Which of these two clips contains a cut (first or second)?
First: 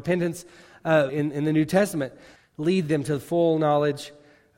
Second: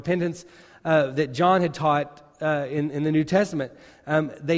first